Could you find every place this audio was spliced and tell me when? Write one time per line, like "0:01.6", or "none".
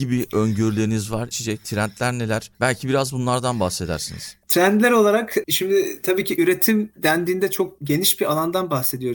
0:01.3